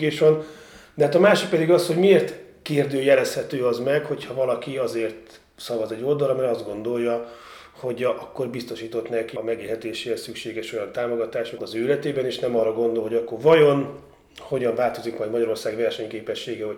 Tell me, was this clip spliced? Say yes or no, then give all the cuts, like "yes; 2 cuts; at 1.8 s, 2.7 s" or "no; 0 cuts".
yes; 2 cuts; at 9.4 s, 11.6 s